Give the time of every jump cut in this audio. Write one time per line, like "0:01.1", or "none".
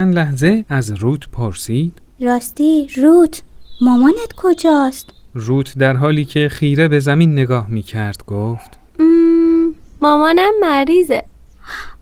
none